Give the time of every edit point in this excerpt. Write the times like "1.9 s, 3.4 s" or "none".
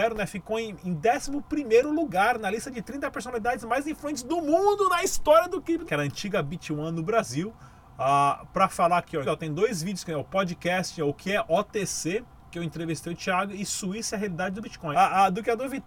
5.9 s, 9.2 s, 14.9 s